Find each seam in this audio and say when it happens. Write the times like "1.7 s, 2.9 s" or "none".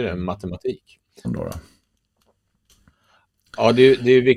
1.2 s